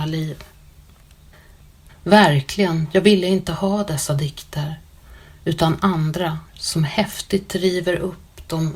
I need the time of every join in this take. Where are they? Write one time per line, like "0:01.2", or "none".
0:01.9
0:06.5